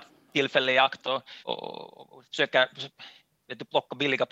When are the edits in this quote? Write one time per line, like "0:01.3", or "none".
0:01.4